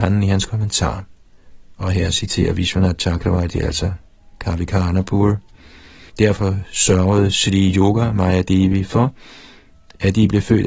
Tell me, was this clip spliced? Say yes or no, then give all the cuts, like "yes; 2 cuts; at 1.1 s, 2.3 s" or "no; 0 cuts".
yes; 1 cut; at 6.1 s